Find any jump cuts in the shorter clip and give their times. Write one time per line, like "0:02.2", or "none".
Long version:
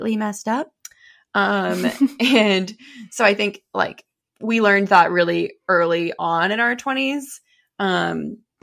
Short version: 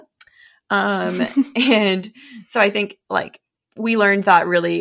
none